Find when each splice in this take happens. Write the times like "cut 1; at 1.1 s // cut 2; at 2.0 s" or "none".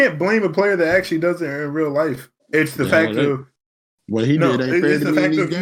cut 1; at 2.4 s